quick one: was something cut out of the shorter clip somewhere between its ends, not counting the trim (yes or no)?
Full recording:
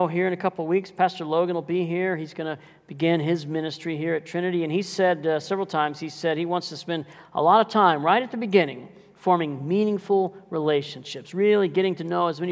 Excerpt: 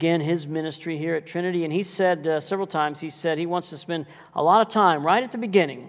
no